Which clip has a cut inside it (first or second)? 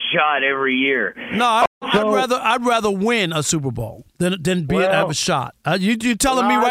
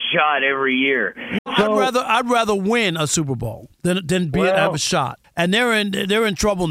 second